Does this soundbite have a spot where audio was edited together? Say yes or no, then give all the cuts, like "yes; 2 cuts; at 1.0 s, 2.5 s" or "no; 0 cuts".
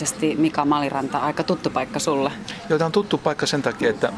no; 0 cuts